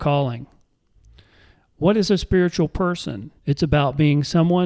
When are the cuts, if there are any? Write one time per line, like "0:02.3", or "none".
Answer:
0:03.4